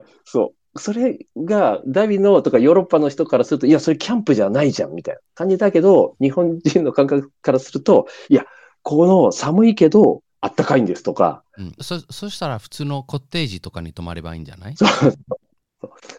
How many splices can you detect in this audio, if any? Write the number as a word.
two